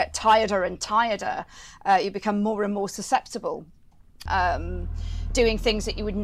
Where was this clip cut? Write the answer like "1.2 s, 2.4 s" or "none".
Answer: 4.3 s, 5.3 s

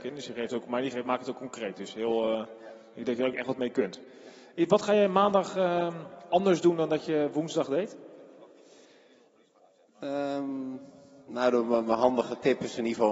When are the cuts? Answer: none

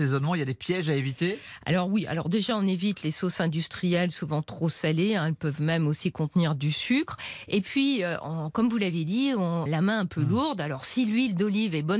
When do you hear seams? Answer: 9.7 s

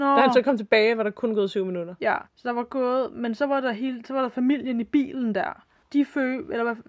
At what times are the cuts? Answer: 2.3 s, 5.8 s

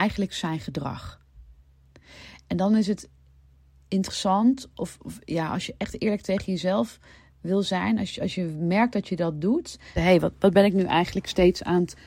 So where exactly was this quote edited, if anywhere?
10.0 s

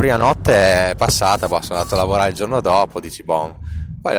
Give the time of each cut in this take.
none

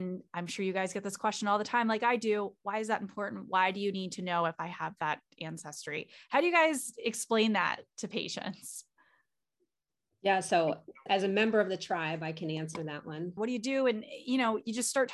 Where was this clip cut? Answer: 11.1 s, 13.4 s

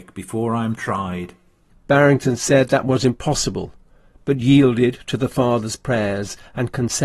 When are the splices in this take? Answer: 1.7 s

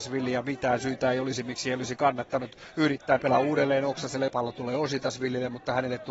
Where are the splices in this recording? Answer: 3.2 s, 4.3 s

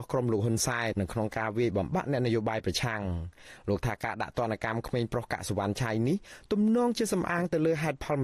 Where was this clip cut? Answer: 0.9 s

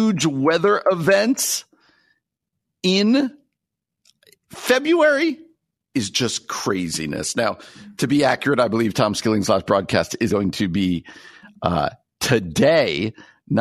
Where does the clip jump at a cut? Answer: 10.3 s

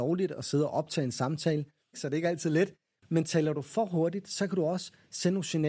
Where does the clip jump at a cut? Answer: 1.9 s

